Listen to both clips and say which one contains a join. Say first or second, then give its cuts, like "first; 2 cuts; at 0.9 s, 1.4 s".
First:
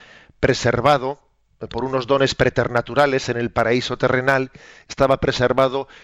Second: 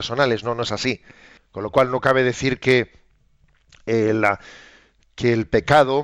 second; 1 cut; at 1.4 s